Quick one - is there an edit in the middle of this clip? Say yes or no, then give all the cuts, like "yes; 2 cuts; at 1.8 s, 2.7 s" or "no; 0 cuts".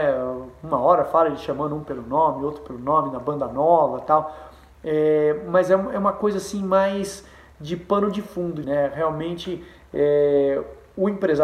yes; 1 cut; at 8.6 s